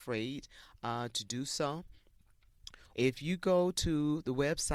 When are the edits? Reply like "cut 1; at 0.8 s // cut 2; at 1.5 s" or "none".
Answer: cut 1; at 2.9 s

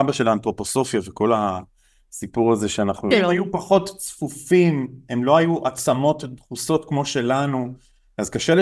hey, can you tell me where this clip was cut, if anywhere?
cut 1; at 3.1 s

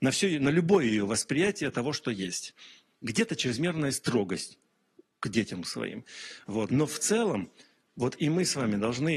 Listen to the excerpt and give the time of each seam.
cut 1; at 6.7 s

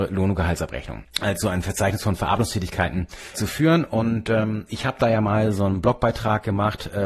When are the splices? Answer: cut 1; at 1.0 s // cut 2; at 3.3 s

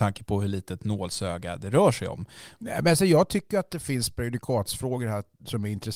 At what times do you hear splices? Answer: cut 1; at 2.6 s

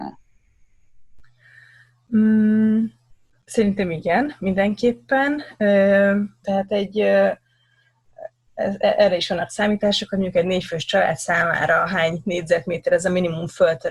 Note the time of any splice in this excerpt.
cut 1; at 6.4 s

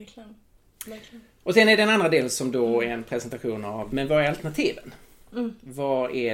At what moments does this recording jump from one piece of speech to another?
cut 1; at 3.9 s

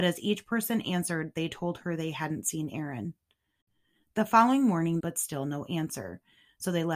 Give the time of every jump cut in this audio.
cut 1; at 5.0 s

